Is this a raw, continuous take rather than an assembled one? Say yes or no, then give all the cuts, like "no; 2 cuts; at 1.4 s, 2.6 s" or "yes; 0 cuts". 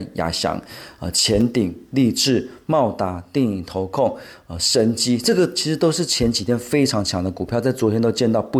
yes; 0 cuts